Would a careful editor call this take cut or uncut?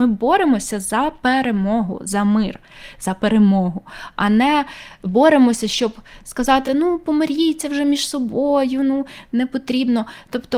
uncut